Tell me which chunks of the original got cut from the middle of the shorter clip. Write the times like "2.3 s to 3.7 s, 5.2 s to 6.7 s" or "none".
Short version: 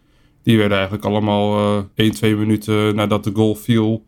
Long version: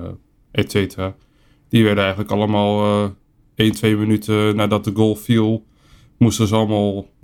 3.2 s to 3.5 s